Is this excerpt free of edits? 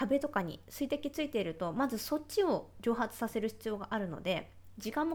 yes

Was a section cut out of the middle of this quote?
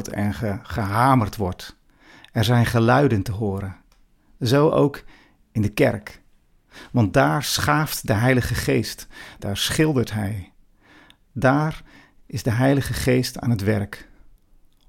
yes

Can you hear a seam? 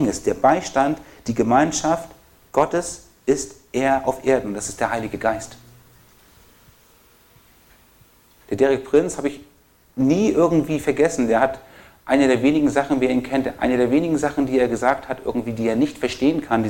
no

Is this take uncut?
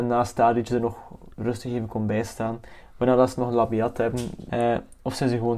no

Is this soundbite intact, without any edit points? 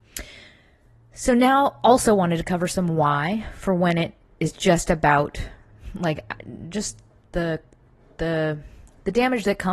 yes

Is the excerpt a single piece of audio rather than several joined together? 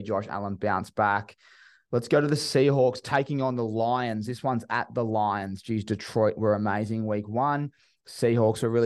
yes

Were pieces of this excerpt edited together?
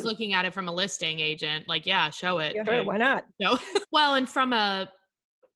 yes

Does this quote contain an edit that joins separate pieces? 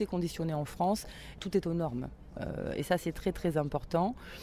yes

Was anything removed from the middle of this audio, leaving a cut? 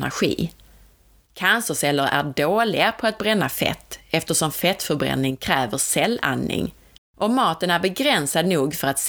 yes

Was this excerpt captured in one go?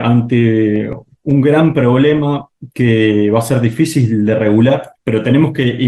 no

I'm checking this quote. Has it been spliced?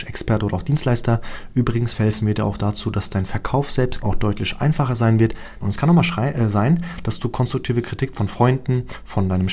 yes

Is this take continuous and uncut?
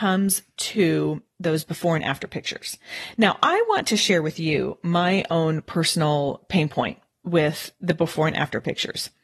yes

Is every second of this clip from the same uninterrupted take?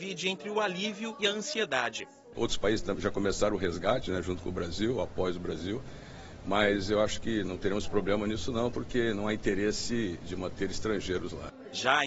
no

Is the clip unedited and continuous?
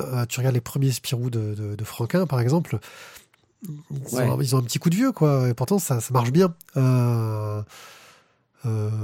yes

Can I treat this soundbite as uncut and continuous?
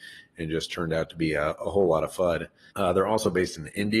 no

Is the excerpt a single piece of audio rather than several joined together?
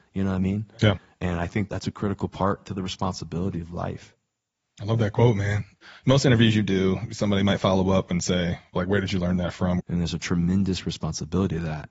no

